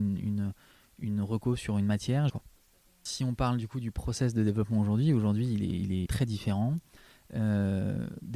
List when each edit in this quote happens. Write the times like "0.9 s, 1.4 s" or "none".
2.3 s, 6.1 s